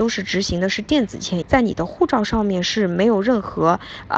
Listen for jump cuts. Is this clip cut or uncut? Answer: cut